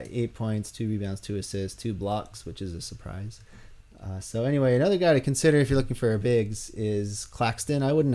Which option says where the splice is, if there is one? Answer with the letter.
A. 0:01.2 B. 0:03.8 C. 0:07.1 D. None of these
B